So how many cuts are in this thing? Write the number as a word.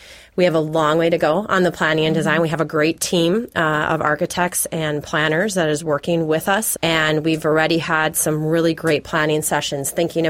one